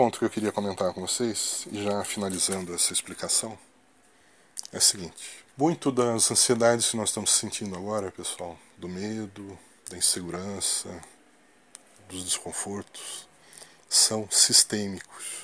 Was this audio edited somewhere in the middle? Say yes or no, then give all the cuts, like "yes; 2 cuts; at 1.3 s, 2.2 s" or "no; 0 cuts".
yes; 2 cuts; at 5.5 s, 12.0 s